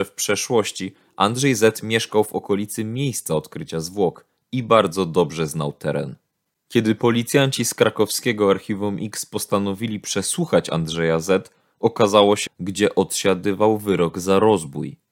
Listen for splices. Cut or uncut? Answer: cut